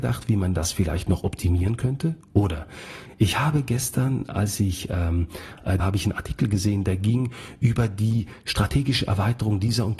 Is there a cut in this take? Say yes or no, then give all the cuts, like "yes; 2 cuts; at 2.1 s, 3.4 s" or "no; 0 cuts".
yes; 1 cut; at 5.8 s